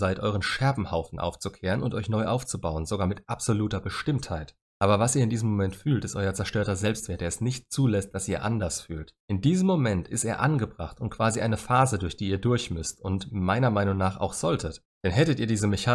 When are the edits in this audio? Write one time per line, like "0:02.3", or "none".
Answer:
none

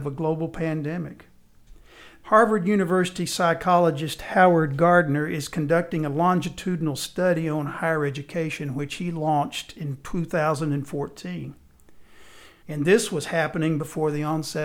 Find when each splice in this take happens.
0:02.2
0:12.6

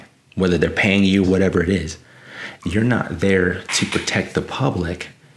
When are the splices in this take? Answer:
0:01.2
0:02.6

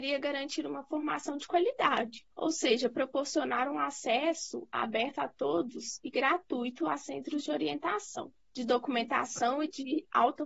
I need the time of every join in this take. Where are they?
0:02.3
0:08.4

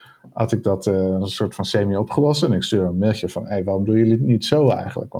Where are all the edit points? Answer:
none

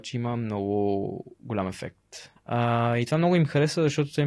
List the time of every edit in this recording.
0:02.4

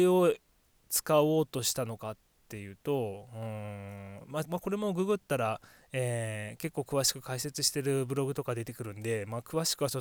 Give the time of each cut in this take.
0:04.4

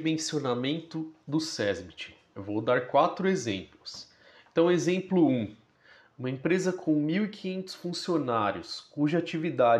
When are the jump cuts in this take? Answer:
none

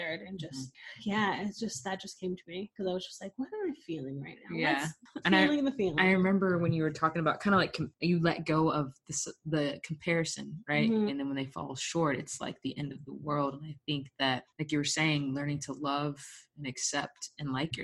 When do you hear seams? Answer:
0:05.2
0:11.1

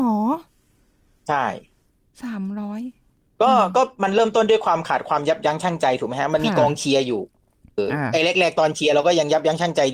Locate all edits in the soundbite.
0:07.8

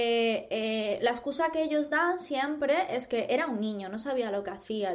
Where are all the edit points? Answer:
none

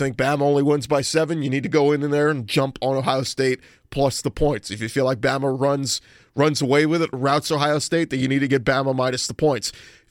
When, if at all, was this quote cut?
none

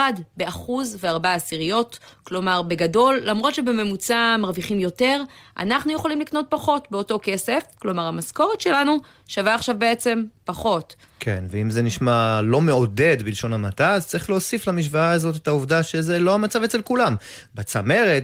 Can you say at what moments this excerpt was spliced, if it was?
none

